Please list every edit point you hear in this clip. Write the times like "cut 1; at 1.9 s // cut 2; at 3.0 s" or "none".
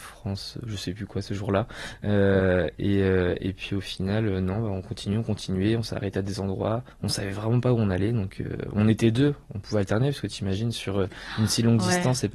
none